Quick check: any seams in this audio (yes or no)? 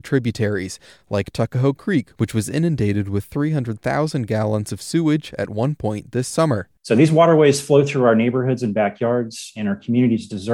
no